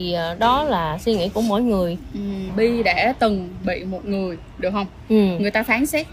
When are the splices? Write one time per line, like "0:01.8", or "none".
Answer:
0:02.5